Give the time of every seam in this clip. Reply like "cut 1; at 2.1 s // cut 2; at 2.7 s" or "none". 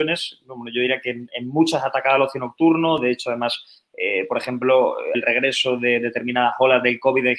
cut 1; at 5.1 s